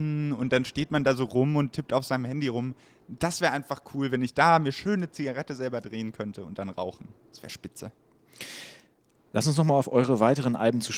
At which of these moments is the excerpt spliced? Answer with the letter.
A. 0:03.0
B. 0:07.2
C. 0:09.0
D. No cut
D